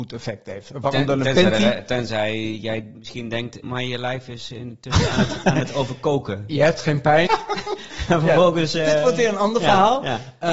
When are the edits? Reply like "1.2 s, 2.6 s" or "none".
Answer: 3.6 s, 7.3 s